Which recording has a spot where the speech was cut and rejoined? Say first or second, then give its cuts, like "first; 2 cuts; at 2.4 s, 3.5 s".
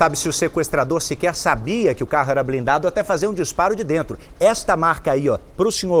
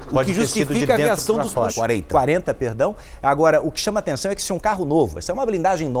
second; 1 cut; at 1.7 s